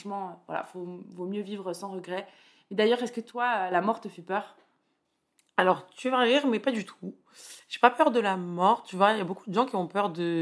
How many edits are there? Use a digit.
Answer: 0